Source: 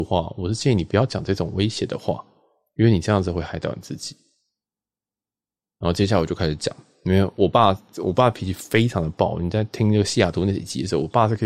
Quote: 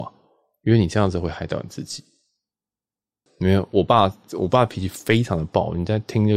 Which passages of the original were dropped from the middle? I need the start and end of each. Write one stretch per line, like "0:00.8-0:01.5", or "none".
0:05.4-0:06.9